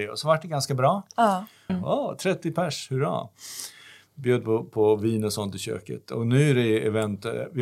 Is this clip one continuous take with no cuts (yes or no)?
no